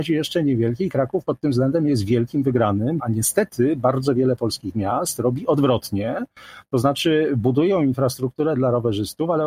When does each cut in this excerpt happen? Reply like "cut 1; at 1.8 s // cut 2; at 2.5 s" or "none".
cut 1; at 3.0 s